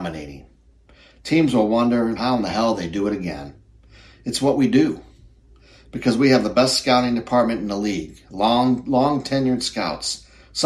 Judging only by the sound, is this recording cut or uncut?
cut